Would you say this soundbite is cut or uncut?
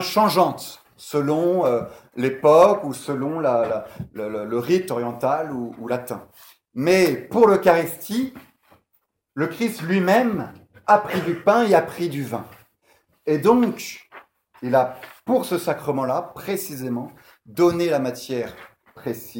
uncut